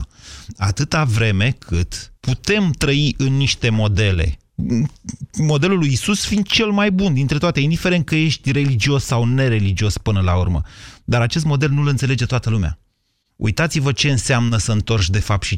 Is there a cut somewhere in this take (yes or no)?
yes